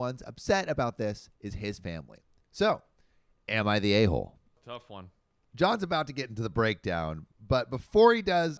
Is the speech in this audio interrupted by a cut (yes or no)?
no